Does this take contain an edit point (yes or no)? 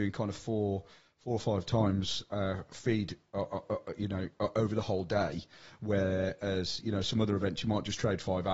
no